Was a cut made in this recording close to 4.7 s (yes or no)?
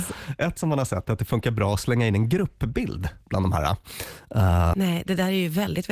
yes